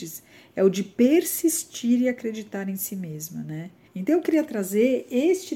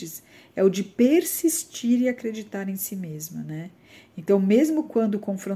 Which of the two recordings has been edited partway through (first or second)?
first